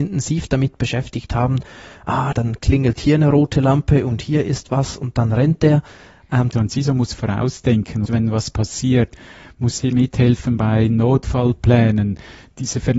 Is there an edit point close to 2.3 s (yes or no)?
yes